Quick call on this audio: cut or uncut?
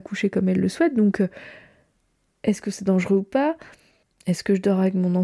uncut